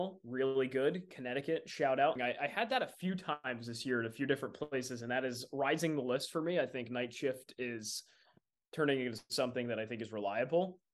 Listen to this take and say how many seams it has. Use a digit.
1